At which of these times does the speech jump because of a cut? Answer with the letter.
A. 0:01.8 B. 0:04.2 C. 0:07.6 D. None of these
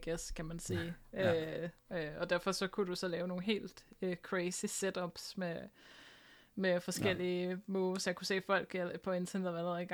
A